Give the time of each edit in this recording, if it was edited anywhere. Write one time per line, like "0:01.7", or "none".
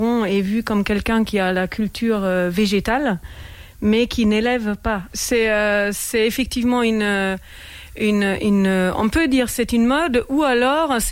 0:05.1